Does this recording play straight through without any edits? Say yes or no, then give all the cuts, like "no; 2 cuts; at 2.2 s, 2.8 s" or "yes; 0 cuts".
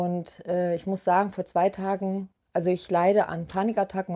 yes; 0 cuts